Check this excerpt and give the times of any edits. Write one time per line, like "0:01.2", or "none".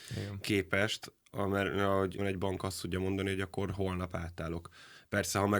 0:02.2